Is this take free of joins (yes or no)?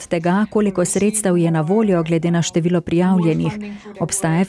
yes